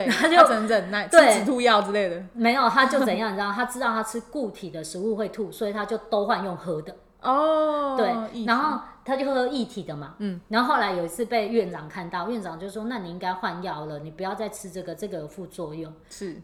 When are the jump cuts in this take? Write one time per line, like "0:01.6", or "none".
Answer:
none